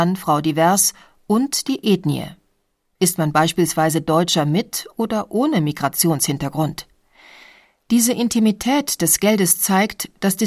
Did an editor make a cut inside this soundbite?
no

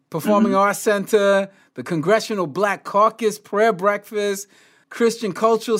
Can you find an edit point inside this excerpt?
yes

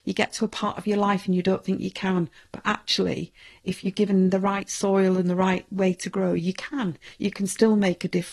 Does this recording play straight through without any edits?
yes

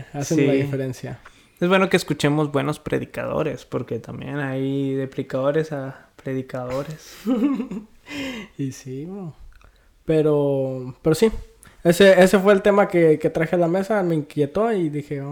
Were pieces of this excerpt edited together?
no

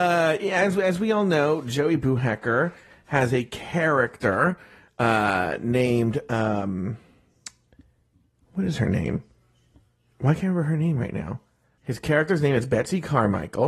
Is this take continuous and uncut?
no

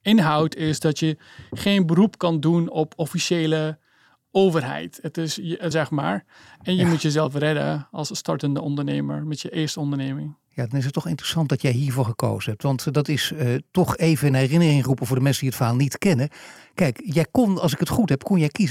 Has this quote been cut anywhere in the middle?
yes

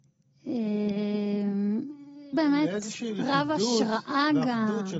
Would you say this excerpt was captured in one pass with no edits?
no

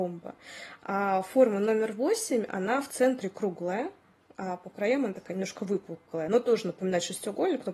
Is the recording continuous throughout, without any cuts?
yes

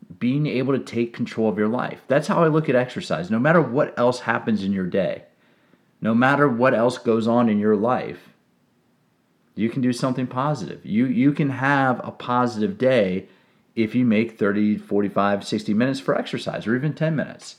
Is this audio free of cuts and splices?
yes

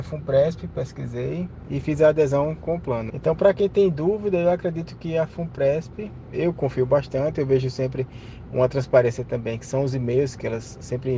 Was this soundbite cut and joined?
yes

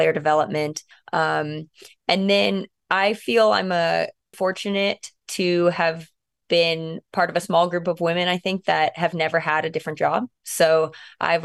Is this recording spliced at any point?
yes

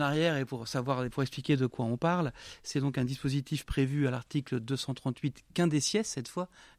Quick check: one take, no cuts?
yes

